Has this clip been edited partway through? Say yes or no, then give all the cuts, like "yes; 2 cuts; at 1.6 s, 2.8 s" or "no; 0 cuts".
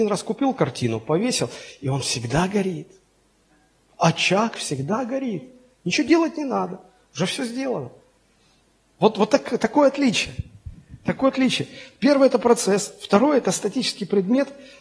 no; 0 cuts